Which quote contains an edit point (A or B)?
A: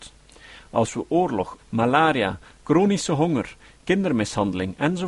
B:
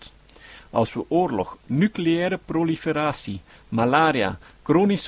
A